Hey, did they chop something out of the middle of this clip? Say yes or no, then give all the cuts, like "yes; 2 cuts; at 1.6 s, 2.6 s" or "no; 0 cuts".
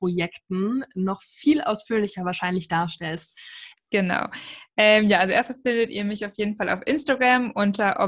yes; 1 cut; at 3.8 s